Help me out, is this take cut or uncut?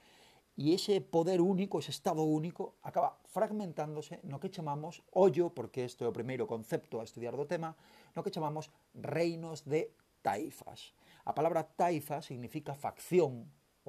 uncut